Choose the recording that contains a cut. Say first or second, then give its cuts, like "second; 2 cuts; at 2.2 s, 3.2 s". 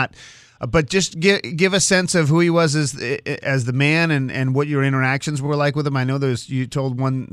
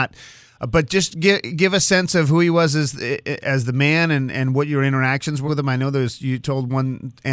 second; 1 cut; at 5.5 s